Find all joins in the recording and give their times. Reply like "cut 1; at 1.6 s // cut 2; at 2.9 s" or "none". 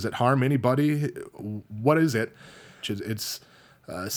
cut 1; at 2.8 s